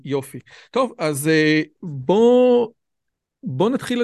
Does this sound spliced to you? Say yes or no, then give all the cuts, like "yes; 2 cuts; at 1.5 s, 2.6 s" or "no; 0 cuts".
no; 0 cuts